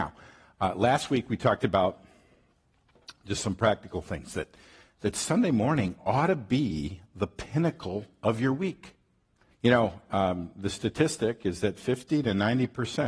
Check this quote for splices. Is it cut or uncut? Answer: cut